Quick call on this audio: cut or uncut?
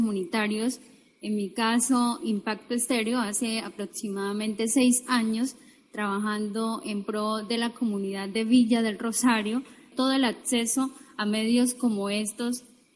cut